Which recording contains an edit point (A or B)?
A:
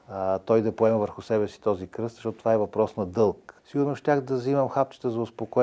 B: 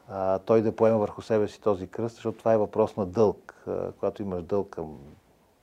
A